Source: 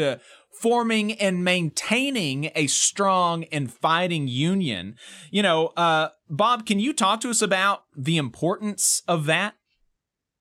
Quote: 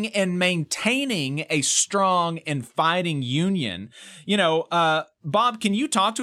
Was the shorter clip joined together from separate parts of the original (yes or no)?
no